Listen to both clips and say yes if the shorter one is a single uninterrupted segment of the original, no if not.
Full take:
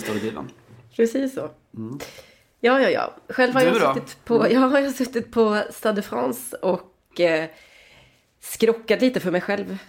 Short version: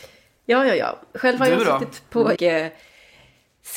no